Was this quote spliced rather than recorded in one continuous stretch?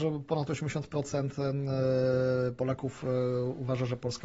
no; 0 cuts

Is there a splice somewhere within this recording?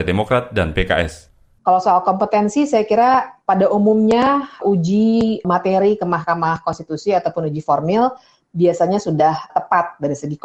yes; 2 cuts; at 1.6 s, 9.5 s

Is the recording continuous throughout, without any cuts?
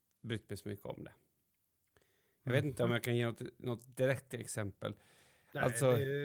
yes; 0 cuts

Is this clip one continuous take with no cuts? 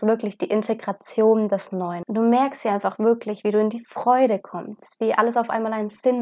no; 1 cut; at 2.0 s

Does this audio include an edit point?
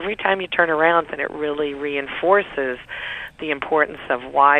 yes; 1 cut; at 1.0 s

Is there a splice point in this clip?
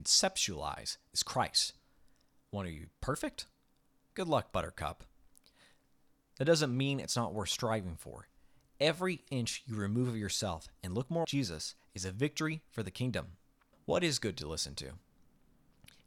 yes; 2 cuts; at 11.2 s, 13.7 s

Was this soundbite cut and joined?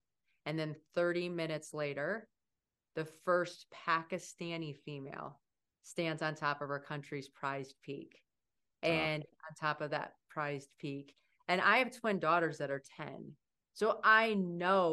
yes; 1 cut; at 9.3 s

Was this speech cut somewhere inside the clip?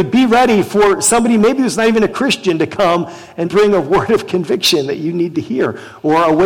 yes; 1 cut; at 3.4 s

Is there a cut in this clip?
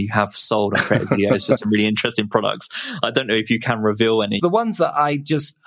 yes; 1 cut; at 4.4 s

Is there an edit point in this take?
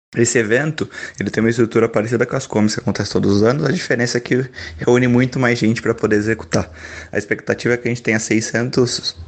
no; 0 cuts

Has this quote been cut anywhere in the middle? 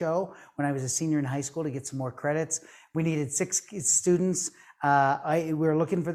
no; 0 cuts

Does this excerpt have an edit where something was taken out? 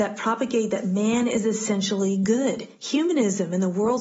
yes; 1 cut; at 2.7 s

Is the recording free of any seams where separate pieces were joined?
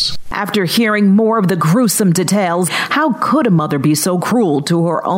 no; 1 cut; at 2.7 s

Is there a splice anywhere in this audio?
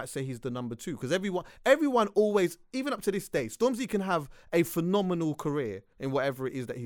no; 0 cuts

